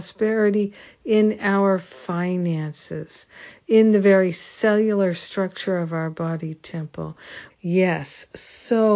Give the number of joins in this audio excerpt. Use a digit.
1